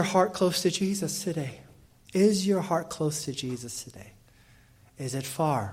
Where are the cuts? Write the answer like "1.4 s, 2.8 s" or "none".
2.1 s

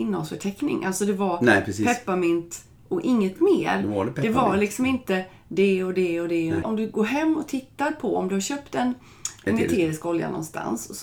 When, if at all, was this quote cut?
6.6 s

